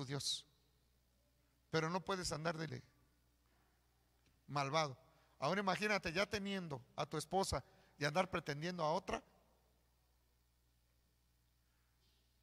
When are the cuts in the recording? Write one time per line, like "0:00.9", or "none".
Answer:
0:02.7